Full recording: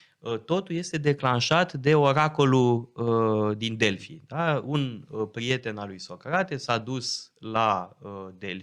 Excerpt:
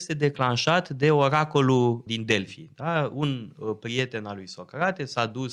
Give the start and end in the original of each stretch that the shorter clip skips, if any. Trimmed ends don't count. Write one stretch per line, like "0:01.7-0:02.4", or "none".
0:02.9-0:03.6